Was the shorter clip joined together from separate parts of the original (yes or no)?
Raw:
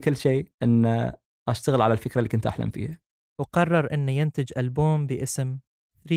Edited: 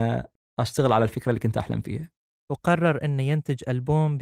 no